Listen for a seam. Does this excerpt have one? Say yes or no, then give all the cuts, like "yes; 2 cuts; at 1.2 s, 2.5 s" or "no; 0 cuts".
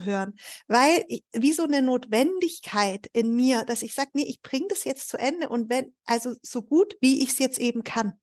no; 0 cuts